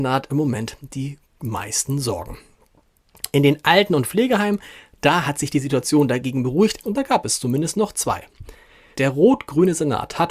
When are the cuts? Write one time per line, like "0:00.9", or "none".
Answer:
0:06.8
0:09.0